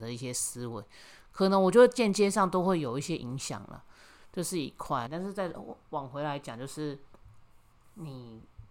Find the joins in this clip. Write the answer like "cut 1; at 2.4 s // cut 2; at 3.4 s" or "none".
cut 1; at 5.1 s